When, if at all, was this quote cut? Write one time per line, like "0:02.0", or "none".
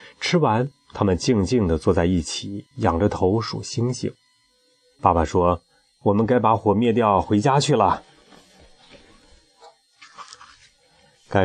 0:04.9